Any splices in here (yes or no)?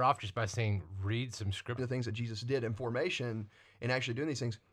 yes